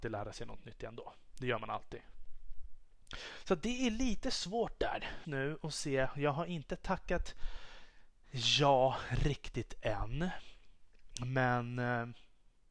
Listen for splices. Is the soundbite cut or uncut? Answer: cut